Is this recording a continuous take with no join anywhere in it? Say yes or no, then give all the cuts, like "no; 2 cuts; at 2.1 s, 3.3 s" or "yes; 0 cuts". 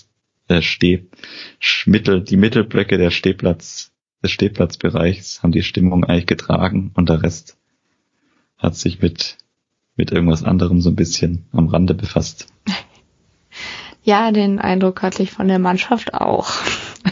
yes; 0 cuts